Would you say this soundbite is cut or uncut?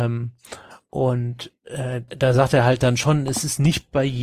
cut